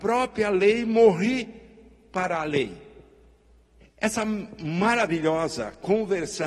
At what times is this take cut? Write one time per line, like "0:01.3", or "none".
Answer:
0:03.8